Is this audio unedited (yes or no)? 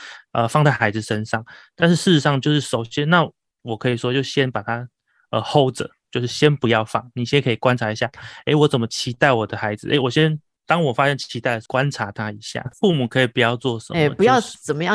no